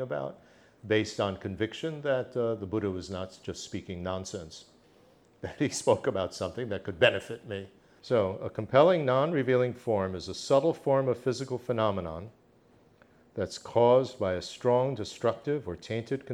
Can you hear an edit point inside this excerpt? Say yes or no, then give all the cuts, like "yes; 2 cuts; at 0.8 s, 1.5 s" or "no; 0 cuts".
yes; 1 cut; at 8.0 s